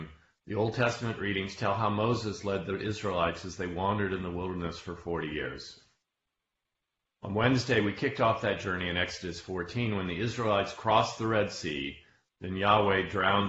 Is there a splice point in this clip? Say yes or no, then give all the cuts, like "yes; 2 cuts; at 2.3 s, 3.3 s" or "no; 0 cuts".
no; 0 cuts